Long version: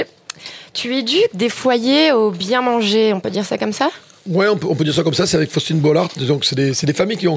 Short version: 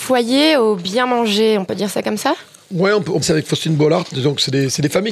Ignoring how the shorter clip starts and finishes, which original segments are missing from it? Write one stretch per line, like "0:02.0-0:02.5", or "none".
0:04.8-0:05.3